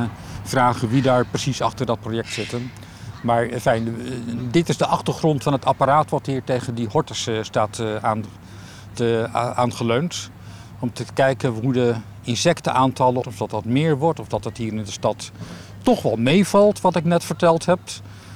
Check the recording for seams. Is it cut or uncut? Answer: cut